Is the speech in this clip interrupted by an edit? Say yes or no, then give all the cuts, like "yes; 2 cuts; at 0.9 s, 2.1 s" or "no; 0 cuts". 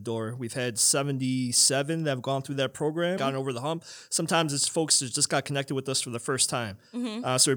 yes; 1 cut; at 3.2 s